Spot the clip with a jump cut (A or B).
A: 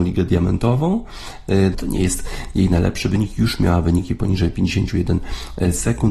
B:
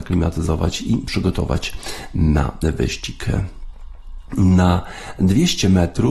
A